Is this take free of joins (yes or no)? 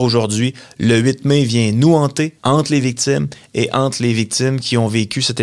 no